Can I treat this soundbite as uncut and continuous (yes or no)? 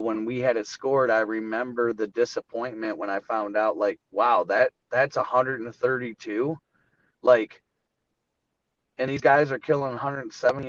yes